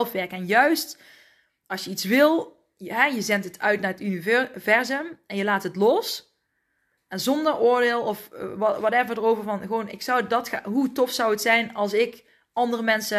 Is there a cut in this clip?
no; 0 cuts

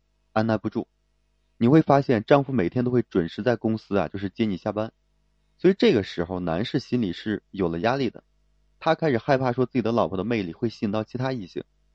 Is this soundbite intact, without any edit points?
yes; 0 cuts

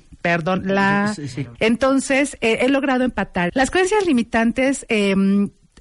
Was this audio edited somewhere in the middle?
yes; 2 cuts; at 1.5 s, 3.5 s

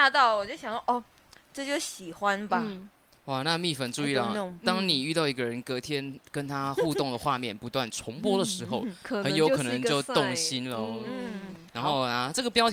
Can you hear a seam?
yes; 1 cut; at 11.7 s

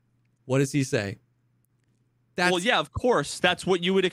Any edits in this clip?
no; 0 cuts

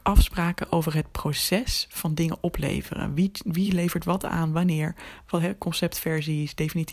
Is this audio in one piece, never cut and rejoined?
yes; 0 cuts

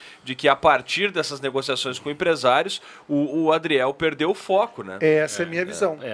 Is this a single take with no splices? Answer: yes; 0 cuts

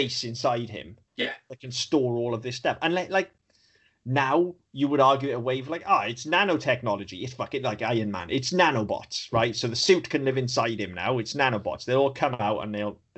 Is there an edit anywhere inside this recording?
no; 0 cuts

